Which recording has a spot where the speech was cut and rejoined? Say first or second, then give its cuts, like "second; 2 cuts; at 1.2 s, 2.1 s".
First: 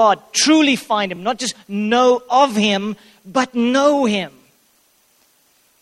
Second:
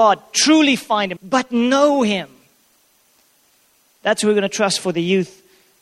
second; 2 cuts; at 1.2 s, 3.9 s